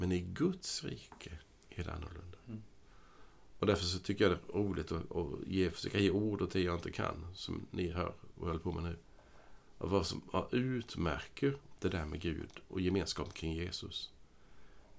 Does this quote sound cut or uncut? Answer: uncut